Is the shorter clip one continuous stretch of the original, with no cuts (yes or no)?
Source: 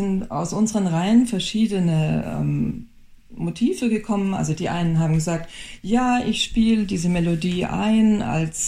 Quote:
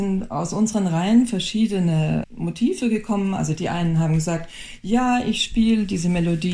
no